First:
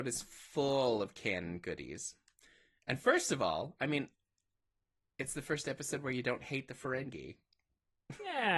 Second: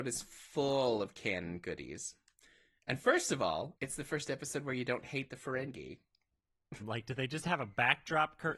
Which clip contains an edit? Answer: second; 2 cuts; at 3.8 s, 6.8 s

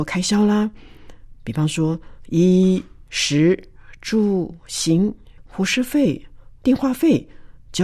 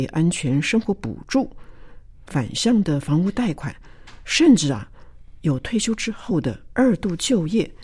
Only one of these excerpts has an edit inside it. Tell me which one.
first; 2 cuts; at 5.4 s, 6.6 s

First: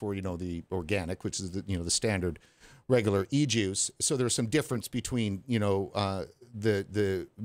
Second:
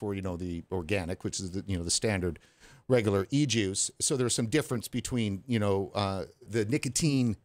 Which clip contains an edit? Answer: second; 1 cut; at 6.5 s

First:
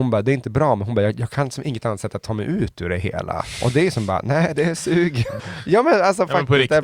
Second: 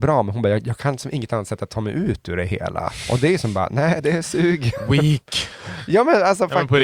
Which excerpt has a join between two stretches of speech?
first; 1 cut; at 5.4 s

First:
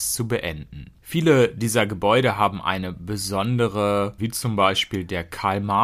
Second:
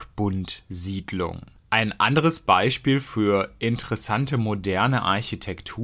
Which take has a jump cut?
first; 2 cuts; at 1.0 s, 4.2 s

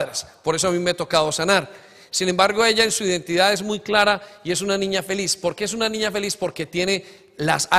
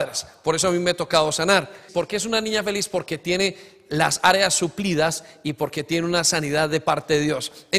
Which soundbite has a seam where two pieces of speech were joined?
second; 1 cut; at 1.9 s

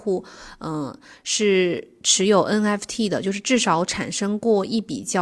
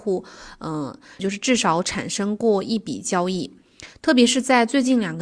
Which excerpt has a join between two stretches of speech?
second; 1 cut; at 1.2 s

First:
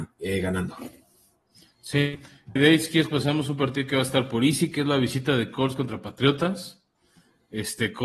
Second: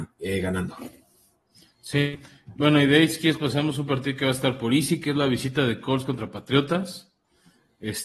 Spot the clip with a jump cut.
first; 1 cut; at 2.6 s

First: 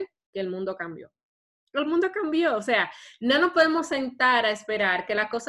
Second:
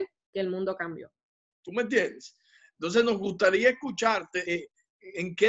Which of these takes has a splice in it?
second; 2 cuts; at 1.5 s, 4.4 s

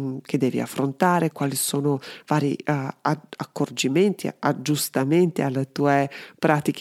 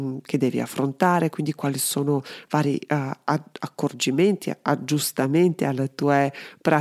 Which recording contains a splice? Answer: first; 1 cut; at 1.3 s

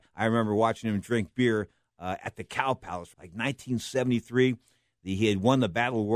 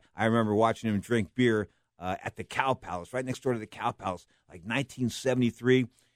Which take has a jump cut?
first; 1 cut; at 3.1 s

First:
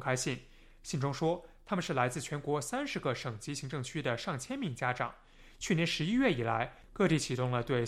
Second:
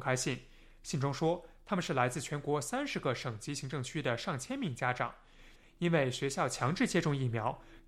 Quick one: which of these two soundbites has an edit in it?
second; 1 cut; at 5.6 s

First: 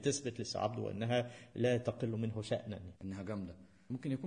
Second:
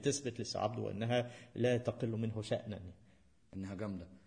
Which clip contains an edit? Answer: first; 1 cut; at 3.0 s

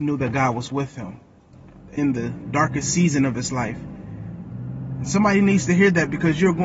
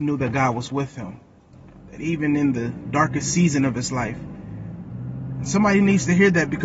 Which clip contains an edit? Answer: first; 1 cut; at 2.0 s

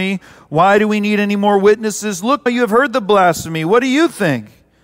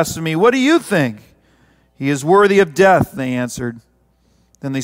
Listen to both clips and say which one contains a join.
first; 1 cut; at 2.5 s

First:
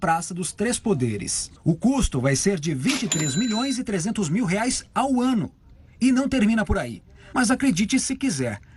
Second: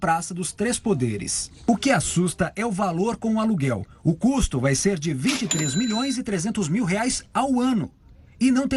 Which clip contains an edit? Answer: first; 2 cuts; at 1.6 s, 7.3 s

